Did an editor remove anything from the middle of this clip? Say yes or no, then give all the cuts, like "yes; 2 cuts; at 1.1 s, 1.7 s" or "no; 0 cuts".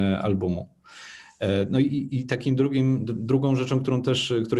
no; 0 cuts